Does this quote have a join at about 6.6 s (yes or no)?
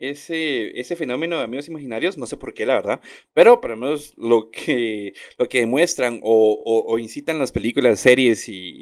no